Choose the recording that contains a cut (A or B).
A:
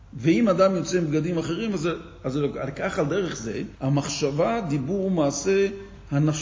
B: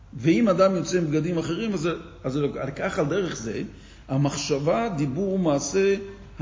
A